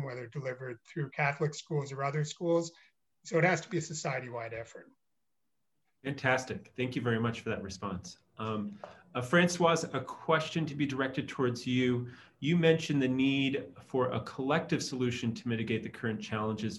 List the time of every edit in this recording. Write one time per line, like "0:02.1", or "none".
none

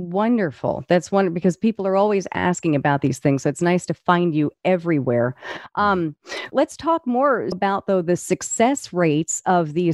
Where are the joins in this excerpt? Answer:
0:06.5
0:07.5

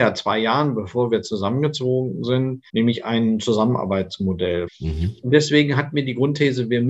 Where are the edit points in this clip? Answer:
0:02.7
0:04.7

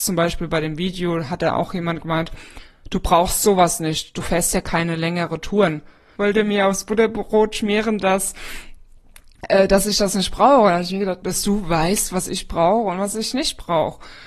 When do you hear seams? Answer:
0:06.2
0:11.2

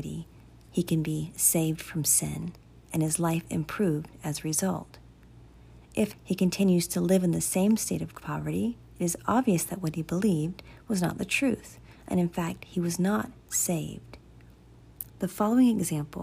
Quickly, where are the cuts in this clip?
0:06.1
0:15.1

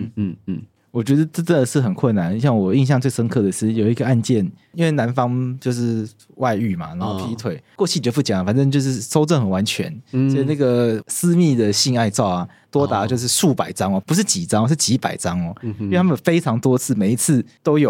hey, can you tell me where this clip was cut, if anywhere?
none

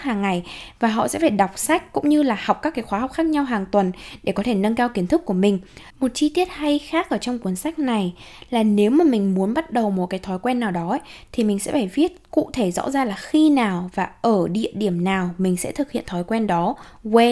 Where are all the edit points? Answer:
0:05.9

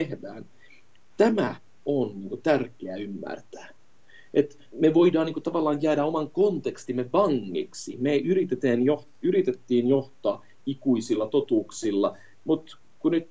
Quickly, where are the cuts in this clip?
0:04.7

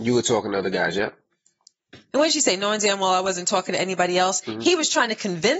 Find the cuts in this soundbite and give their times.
0:02.1

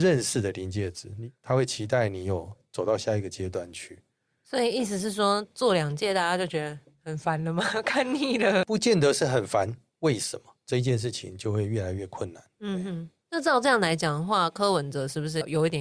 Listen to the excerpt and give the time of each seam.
0:09.9

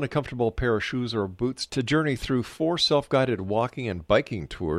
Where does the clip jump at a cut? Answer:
0:01.7

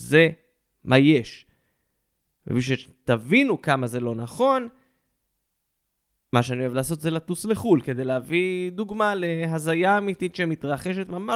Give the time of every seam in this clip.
none

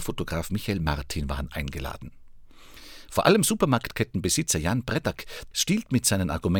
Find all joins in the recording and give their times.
0:03.1
0:05.5

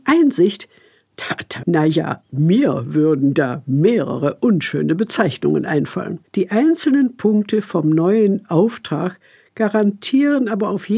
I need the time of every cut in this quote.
0:01.6
0:06.3

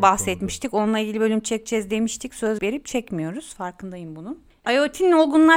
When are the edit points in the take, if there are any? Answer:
0:02.6

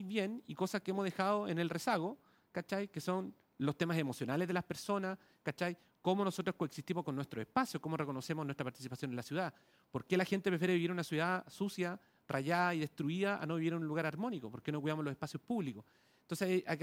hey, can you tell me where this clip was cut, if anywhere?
none

